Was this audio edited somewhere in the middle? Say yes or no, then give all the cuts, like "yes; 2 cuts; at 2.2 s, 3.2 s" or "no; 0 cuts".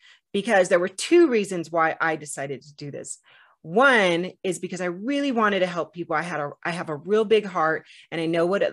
no; 0 cuts